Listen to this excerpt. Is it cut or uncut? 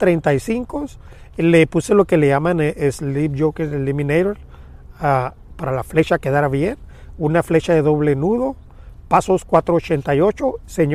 cut